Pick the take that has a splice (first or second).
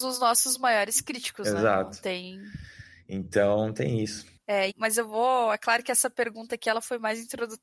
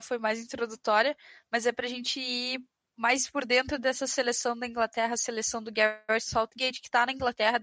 first